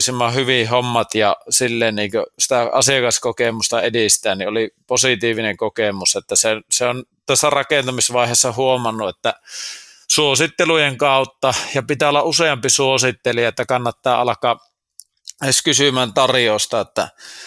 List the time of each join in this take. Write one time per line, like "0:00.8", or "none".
none